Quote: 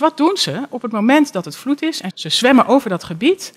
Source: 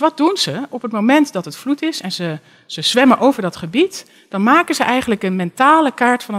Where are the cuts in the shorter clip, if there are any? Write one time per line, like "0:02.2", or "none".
0:02.1